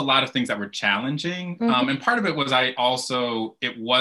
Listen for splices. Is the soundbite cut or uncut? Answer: cut